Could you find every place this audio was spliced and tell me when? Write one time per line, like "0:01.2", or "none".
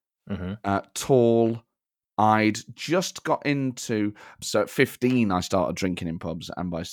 0:04.4